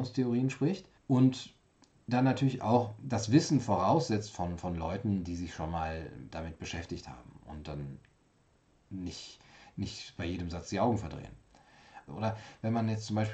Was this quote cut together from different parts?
yes; 2 cuts; at 1.0 s, 12.1 s

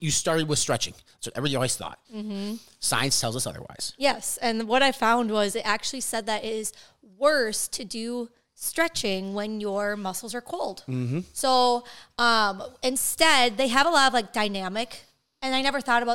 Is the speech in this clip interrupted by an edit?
no; 0 cuts

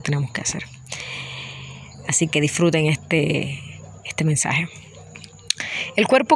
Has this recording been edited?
yes; 2 cuts; at 2.3 s, 4.0 s

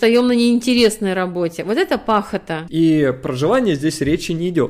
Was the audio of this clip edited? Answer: yes; 1 cut; at 2.7 s

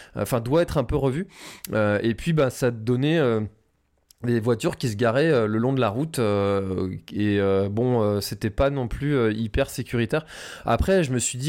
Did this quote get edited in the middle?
no; 0 cuts

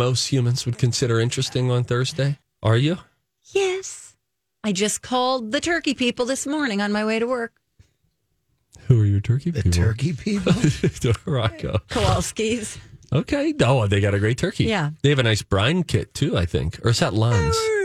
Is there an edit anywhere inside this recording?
yes; 1 cut; at 2.4 s

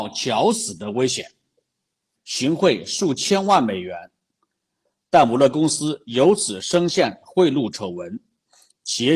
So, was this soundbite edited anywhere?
yes; 1 cut; at 2.1 s

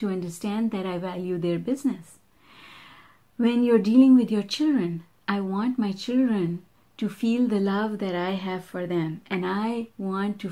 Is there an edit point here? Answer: no; 0 cuts

